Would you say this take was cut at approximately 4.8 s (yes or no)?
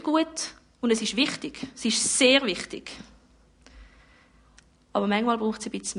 no